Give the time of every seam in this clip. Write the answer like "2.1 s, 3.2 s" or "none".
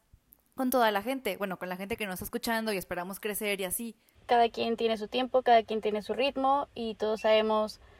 4.2 s

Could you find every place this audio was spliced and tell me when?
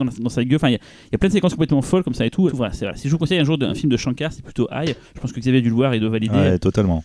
2.5 s

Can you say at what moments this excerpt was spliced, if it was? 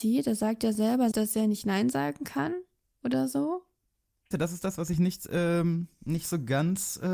1.1 s, 4.3 s

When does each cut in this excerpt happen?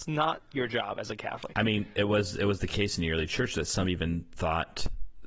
none

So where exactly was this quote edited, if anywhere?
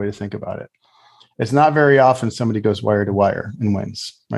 none

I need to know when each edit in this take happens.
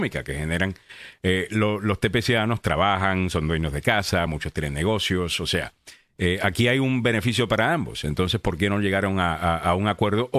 none

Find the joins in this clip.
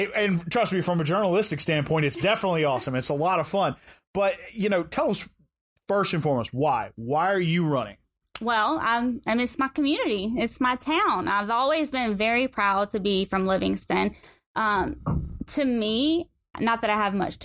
none

